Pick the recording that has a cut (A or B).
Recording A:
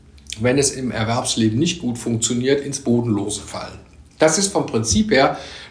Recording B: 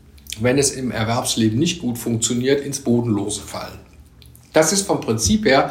A